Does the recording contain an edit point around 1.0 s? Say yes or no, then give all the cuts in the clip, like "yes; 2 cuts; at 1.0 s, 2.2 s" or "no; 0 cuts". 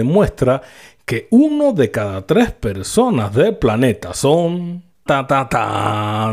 no; 1 cut; at 5.1 s